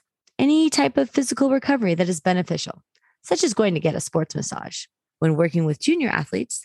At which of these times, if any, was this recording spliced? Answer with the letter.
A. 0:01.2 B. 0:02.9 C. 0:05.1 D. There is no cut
C